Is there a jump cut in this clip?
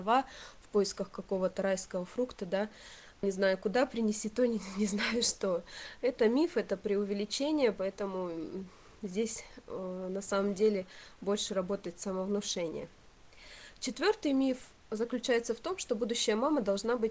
yes; 1 cut; at 3.2 s

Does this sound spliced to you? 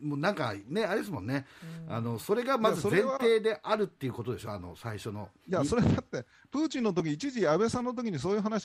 no; 0 cuts

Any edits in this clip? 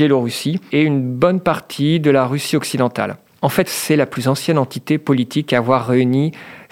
yes; 1 cut; at 3.7 s

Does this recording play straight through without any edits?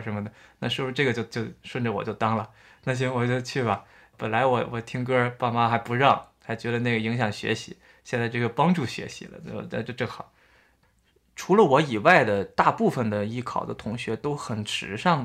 yes; 0 cuts

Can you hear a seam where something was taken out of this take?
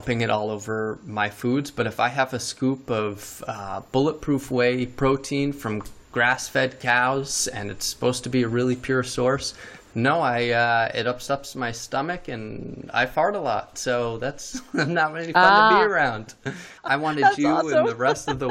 yes; 1 cut; at 16.8 s

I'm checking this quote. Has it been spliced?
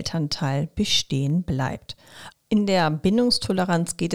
yes; 1 cut; at 2.3 s

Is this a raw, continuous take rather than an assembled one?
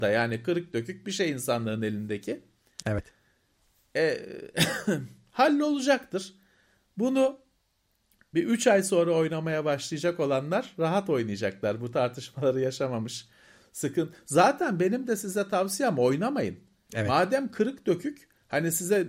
yes; 0 cuts

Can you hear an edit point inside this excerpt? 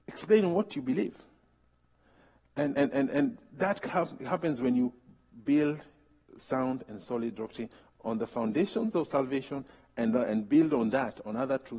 no; 0 cuts

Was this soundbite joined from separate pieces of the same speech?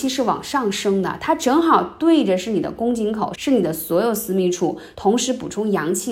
yes; 2 cuts; at 3.3 s, 4.9 s

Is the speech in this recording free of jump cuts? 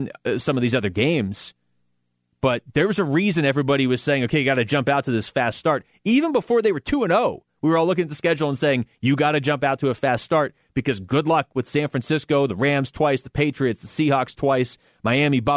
yes; 0 cuts

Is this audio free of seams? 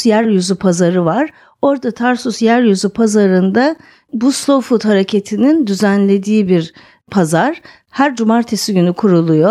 yes; 0 cuts

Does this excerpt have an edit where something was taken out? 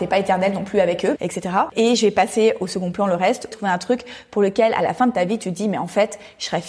yes; 2 cuts; at 1.2 s, 3.5 s

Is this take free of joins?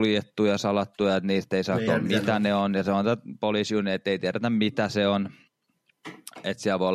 no; 1 cut; at 1.9 s

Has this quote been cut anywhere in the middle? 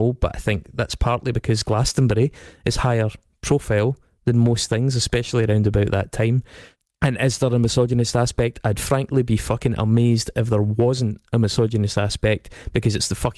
no; 0 cuts

